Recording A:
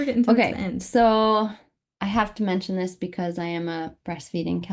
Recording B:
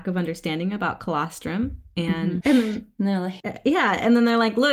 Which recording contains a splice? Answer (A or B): B